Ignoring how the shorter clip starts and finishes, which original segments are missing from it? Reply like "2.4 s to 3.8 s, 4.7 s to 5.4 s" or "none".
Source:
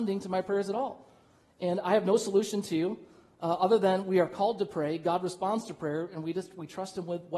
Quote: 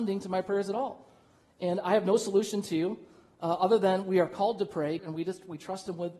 5.0 s to 6.1 s